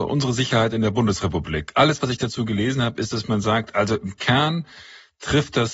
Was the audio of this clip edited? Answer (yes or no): no